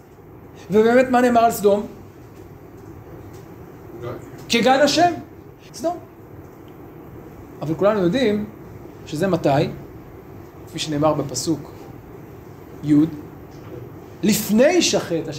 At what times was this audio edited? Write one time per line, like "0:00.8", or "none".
0:05.7